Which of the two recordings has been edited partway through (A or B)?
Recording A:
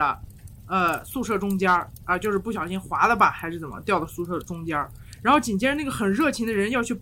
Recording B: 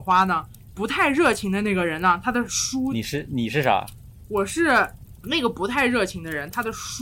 B